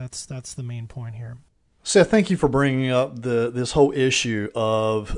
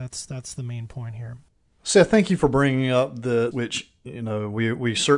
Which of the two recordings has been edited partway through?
second; 1 cut; at 3.5 s

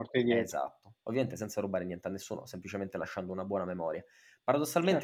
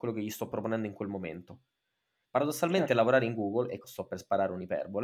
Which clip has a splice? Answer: second; 2 cuts; at 2.3 s, 3.8 s

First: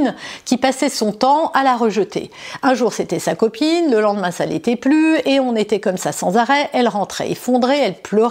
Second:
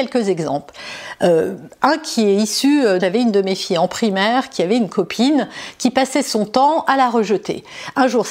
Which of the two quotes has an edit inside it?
second; 1 cut; at 3.0 s

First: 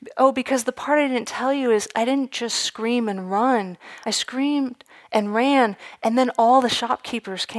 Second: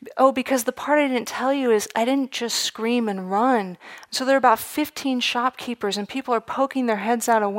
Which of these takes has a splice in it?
second; 1 cut; at 4.1 s

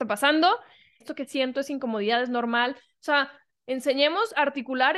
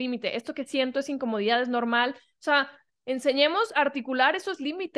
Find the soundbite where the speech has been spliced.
first; 1 cut; at 1.0 s

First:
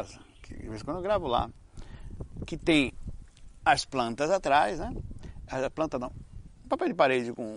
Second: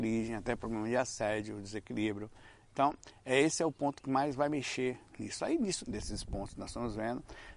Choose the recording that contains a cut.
second; 1 cut; at 5.8 s

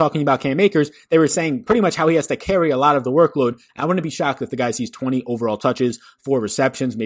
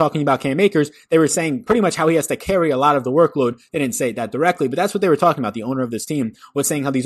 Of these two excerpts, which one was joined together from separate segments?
first; 1 cut; at 3.7 s

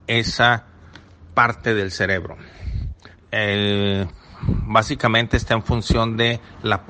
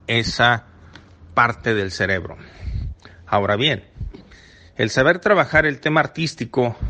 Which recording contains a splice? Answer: first; 1 cut; at 3.1 s

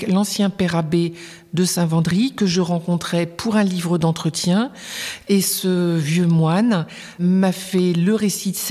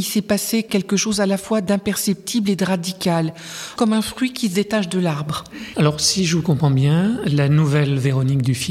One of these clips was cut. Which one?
second; 1 cut; at 5.7 s

